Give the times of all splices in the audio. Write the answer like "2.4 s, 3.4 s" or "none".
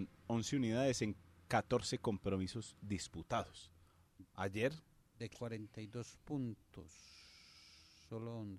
none